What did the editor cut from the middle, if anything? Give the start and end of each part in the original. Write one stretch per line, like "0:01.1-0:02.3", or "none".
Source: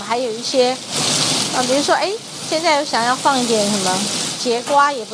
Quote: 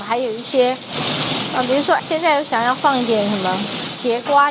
0:02.0-0:02.4